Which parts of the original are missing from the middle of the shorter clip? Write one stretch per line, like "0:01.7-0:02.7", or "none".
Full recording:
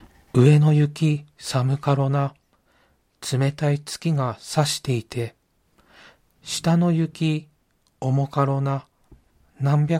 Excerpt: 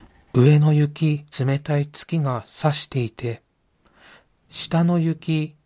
0:01.3-0:03.2